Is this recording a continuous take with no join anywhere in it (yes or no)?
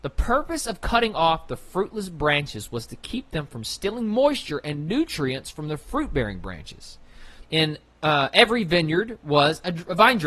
no